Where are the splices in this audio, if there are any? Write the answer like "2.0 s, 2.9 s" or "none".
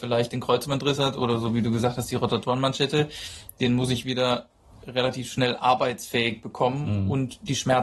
none